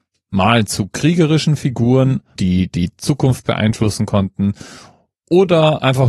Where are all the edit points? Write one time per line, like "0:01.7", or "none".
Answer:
0:02.4